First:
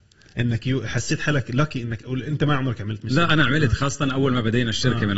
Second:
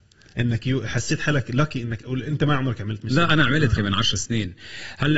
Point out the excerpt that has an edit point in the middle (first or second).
second